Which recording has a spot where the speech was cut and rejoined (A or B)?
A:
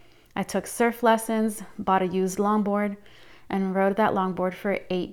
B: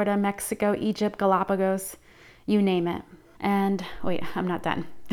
B